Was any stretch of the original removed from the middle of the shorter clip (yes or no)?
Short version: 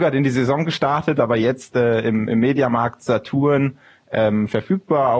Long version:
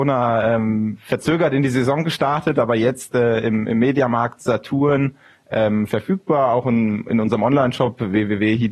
no